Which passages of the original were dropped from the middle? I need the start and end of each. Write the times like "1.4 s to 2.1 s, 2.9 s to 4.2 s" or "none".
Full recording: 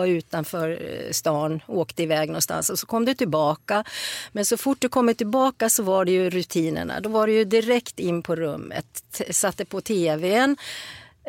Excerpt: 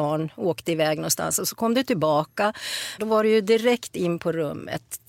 4.3 s to 7.0 s